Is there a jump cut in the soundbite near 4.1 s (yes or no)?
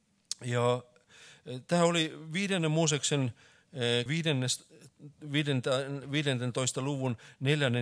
yes